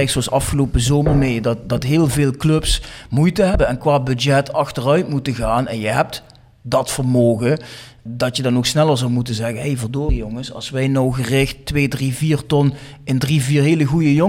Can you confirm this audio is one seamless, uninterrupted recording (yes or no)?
yes